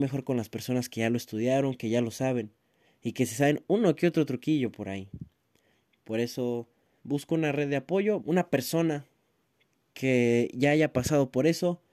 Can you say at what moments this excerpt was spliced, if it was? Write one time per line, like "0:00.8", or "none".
0:07.0
0:08.2

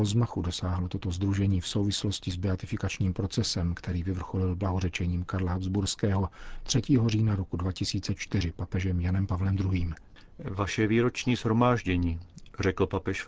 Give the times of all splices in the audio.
none

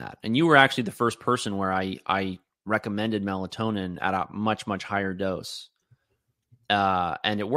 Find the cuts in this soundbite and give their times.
none

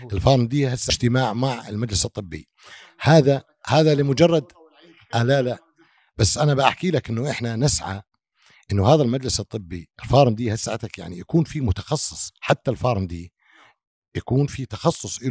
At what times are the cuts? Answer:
0:09.9

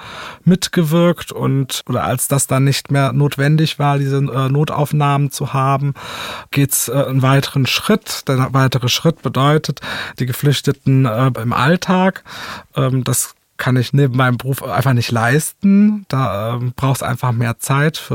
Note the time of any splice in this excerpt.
0:11.3

